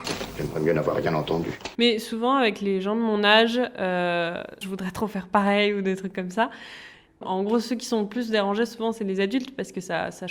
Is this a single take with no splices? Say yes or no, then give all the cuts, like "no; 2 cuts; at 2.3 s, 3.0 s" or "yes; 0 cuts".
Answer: no; 3 cuts; at 1.7 s, 4.6 s, 7.1 s